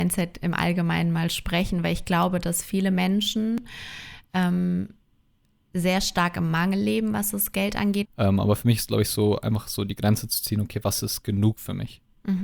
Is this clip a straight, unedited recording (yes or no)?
no